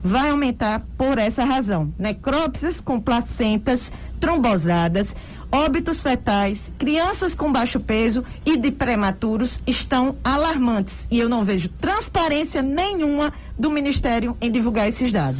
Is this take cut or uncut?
uncut